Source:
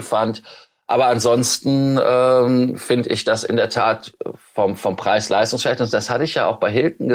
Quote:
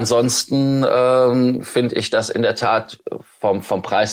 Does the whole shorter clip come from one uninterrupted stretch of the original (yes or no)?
yes